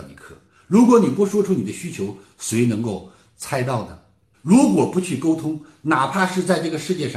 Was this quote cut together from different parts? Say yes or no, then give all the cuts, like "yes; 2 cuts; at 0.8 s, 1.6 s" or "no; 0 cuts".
yes; 1 cut; at 4.3 s